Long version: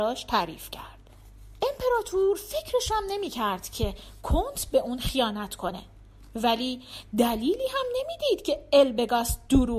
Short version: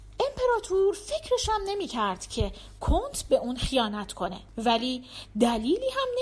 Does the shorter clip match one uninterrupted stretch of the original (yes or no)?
no